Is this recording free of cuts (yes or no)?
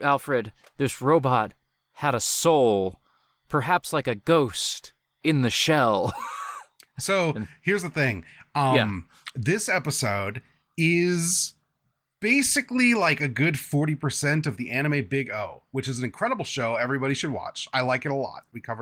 yes